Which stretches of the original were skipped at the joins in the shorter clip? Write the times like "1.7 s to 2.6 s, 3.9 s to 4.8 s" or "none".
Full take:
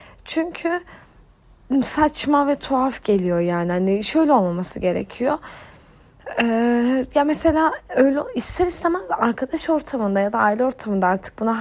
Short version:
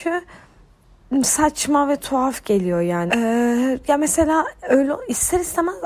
3.7 s to 6.3 s